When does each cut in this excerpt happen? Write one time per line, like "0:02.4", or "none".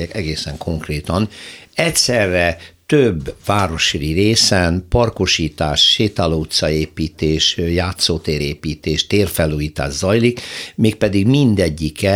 none